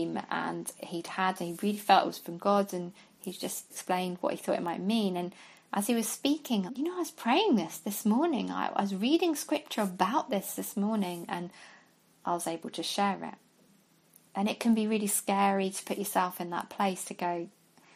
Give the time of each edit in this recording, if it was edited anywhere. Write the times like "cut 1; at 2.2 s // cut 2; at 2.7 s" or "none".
cut 1; at 3.7 s // cut 2; at 6.7 s